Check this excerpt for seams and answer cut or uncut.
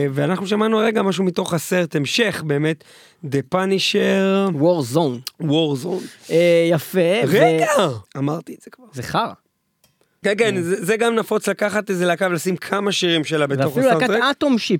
cut